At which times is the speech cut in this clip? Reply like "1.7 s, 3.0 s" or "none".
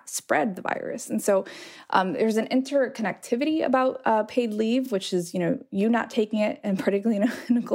none